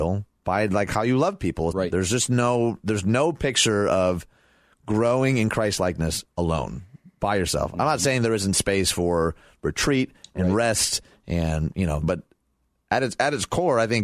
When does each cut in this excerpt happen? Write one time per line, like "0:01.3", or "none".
0:01.7
0:12.0